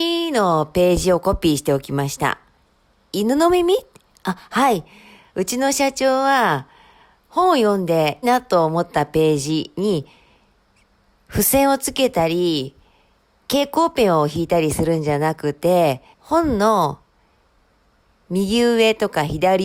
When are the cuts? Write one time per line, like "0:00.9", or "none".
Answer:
0:08.2
0:16.1